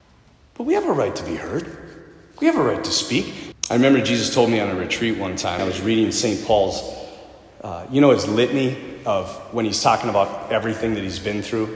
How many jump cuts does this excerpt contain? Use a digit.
2